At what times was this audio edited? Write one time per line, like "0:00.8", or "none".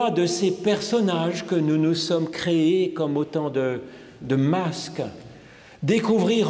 0:04.2